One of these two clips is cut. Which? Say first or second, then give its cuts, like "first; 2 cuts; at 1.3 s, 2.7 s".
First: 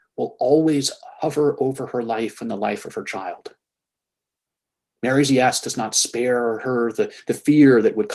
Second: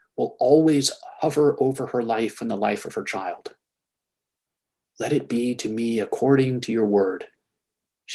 second; 1 cut; at 4.8 s